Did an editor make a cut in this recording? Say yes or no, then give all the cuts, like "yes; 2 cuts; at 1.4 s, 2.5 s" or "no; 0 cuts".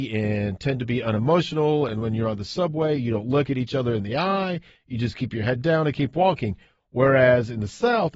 no; 0 cuts